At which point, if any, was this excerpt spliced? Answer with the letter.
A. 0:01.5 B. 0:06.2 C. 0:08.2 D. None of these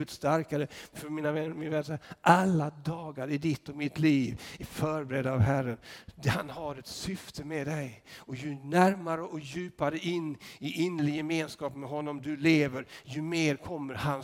D